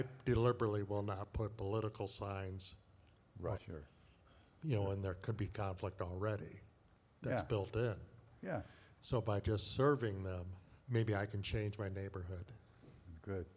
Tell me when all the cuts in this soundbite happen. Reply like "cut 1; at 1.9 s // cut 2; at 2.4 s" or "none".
cut 1; at 3.5 s // cut 2; at 10.8 s